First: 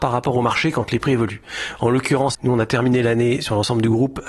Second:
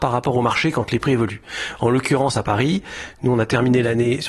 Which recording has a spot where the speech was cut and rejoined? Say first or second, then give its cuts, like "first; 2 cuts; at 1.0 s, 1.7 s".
first; 1 cut; at 2.3 s